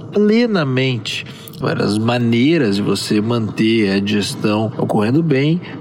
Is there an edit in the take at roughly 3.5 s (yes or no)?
no